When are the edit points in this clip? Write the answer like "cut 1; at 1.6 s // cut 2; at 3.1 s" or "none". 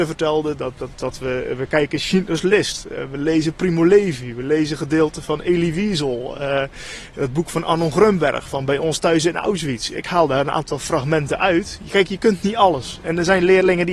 cut 1; at 0.9 s